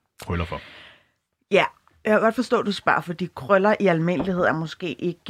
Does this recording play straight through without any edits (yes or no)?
yes